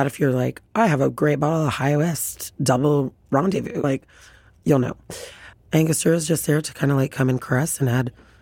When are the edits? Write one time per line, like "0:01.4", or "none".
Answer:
0:03.8
0:05.5